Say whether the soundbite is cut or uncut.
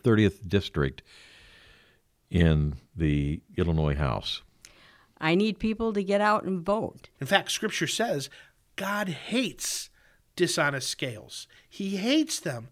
cut